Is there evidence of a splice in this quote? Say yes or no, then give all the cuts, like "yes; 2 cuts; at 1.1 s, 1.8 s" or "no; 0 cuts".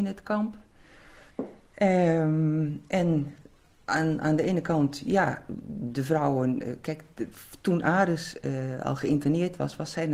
yes; 1 cut; at 1.3 s